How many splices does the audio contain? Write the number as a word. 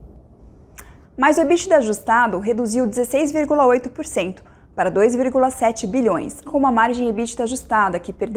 two